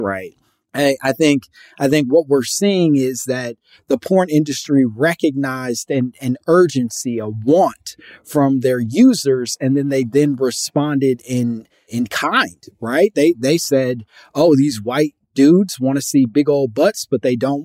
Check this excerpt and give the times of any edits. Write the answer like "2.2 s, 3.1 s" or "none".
none